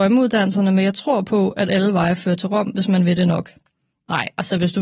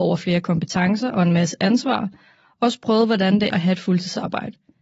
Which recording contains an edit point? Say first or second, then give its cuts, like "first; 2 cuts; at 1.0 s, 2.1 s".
second; 1 cut; at 3.5 s